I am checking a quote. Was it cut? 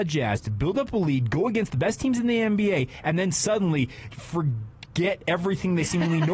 yes; 1 cut; at 4.1 s

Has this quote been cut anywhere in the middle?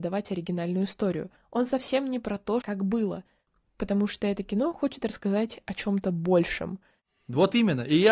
yes; 1 cut; at 2.6 s

